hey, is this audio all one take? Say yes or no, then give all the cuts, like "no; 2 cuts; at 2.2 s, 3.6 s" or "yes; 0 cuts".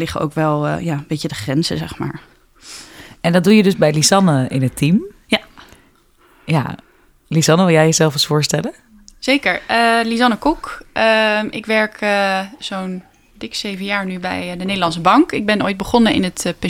yes; 0 cuts